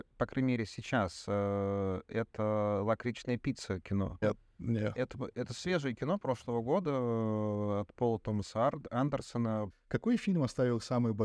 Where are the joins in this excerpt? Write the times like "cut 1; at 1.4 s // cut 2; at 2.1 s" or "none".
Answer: cut 1; at 4.2 s // cut 2; at 9.7 s